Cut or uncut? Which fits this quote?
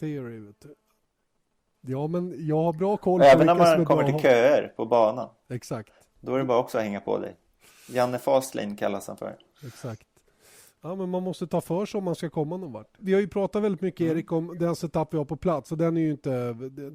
cut